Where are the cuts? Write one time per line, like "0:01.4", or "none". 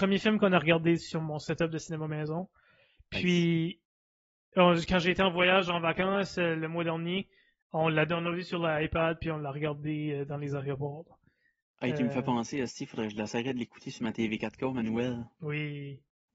none

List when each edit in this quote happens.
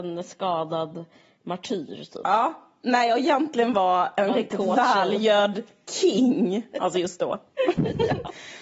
none

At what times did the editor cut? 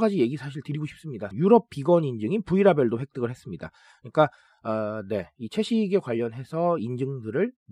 0:01.3

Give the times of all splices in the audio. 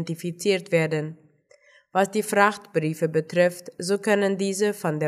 none

